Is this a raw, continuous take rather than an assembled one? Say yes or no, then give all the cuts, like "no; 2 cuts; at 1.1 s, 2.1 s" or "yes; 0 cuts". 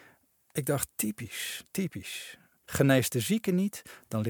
no; 1 cut; at 2.7 s